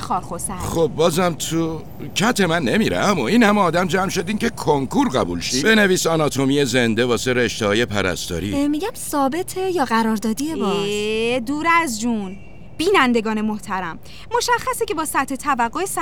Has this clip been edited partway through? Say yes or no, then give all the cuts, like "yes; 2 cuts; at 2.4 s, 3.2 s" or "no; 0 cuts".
yes; 1 cut; at 5.6 s